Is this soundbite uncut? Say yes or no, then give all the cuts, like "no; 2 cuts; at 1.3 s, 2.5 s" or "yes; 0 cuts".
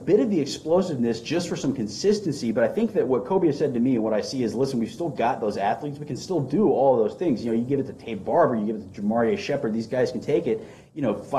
yes; 0 cuts